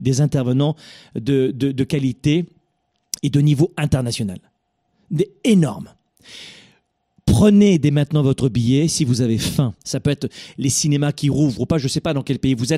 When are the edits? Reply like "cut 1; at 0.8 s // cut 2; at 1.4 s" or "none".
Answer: cut 1; at 9.8 s